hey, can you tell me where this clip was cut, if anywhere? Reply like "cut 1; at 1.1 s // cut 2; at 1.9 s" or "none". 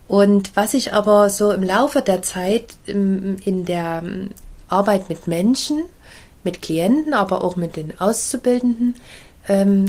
none